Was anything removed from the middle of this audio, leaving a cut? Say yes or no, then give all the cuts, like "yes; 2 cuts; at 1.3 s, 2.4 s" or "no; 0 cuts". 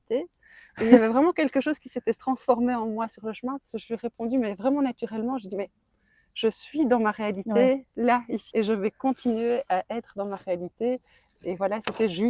yes; 1 cut; at 8.5 s